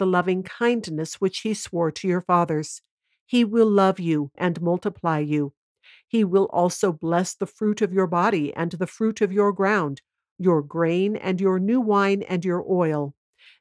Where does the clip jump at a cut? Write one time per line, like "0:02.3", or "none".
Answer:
0:04.4